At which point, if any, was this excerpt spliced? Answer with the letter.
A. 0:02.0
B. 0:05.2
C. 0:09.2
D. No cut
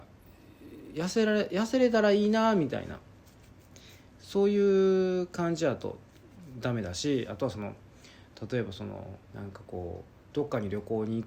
C